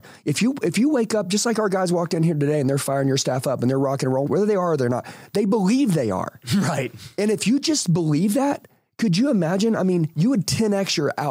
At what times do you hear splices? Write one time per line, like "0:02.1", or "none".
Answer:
0:04.3